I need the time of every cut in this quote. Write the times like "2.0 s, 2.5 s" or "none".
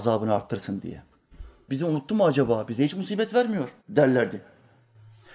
1.7 s, 3.8 s